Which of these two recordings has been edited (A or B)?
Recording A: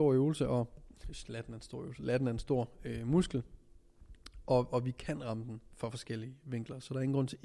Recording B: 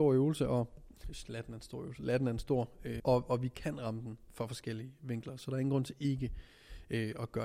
B